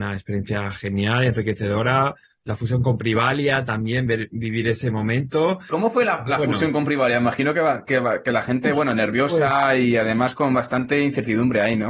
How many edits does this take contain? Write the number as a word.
one